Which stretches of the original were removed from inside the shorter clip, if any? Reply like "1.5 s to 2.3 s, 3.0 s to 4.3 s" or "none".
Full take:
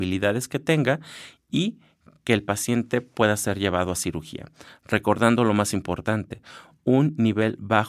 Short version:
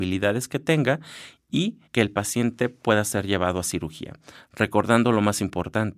1.9 s to 2.2 s

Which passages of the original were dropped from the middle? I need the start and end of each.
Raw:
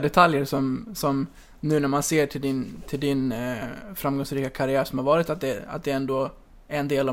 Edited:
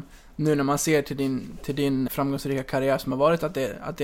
3.3 s to 3.9 s

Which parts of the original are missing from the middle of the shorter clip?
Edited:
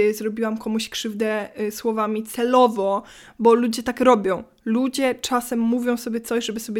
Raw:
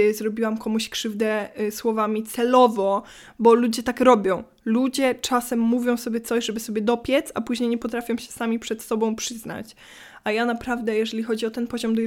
none

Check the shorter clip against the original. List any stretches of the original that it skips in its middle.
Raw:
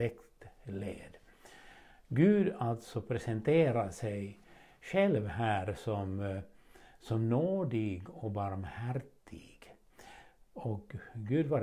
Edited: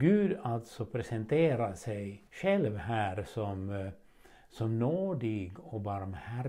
4.4 s to 4.8 s

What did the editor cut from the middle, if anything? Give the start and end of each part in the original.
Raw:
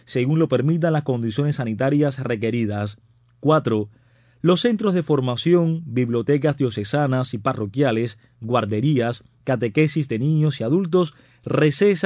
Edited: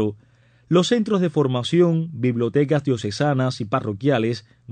none

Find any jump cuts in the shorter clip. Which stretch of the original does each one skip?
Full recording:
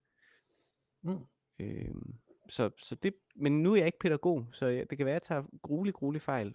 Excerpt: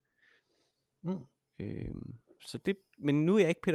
2.4 s to 2.7 s

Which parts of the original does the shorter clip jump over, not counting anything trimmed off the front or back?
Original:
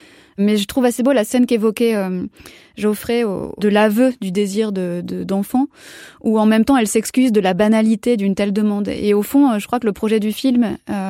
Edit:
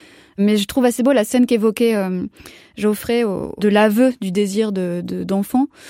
none

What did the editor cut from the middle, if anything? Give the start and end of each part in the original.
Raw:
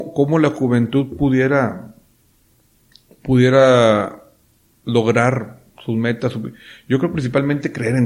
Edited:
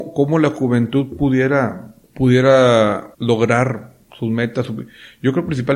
2.0 s to 3.1 s, 4.2 s to 4.8 s

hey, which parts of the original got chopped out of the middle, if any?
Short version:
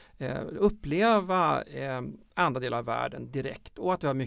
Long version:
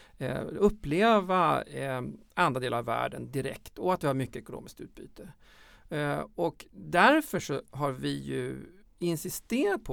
none

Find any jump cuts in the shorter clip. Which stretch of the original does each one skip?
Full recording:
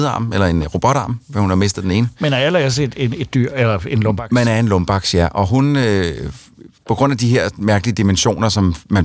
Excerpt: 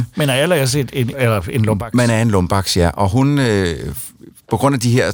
3.2 s to 3.5 s

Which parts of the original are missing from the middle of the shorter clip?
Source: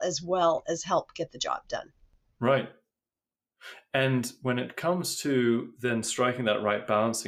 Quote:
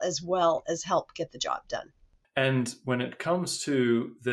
2.2 s to 3.8 s

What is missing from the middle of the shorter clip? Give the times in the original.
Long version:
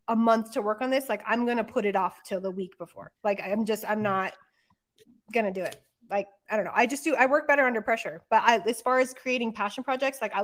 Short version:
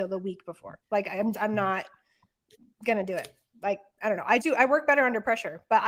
3.7 s to 3.8 s, 6.9 s to 7.0 s

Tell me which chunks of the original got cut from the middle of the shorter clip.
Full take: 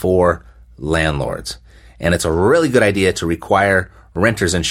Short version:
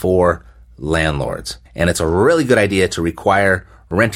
1.7 s to 1.9 s

